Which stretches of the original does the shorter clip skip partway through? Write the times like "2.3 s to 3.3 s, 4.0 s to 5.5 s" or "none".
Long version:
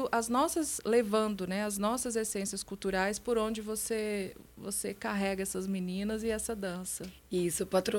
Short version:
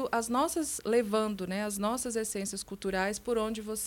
none